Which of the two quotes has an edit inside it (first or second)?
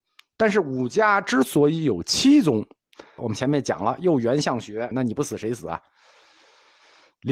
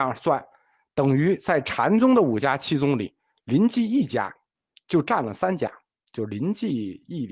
first